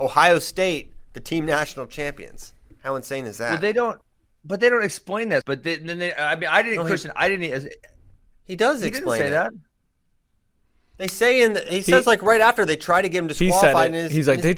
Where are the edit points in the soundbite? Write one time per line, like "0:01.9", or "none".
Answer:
0:05.4